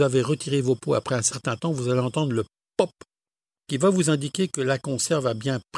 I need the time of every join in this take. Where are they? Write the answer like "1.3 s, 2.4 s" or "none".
none